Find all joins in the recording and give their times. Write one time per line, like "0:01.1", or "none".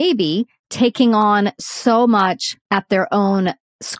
0:02.6